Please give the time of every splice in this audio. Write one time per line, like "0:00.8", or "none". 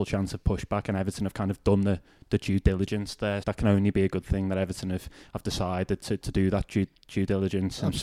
0:03.4